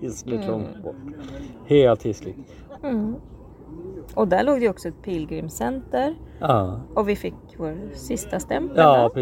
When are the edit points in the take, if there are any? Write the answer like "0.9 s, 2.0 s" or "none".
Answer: 2.8 s, 6.9 s